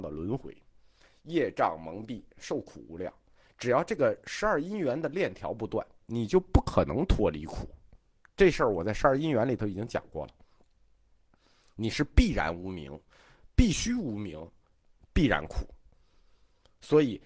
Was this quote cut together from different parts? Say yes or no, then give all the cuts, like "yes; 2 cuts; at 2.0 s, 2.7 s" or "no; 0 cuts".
yes; 1 cut; at 14.9 s